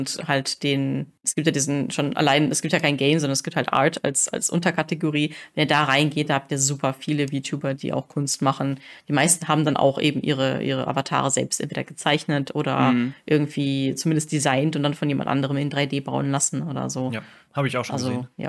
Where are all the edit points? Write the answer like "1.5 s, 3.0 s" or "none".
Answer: 7.8 s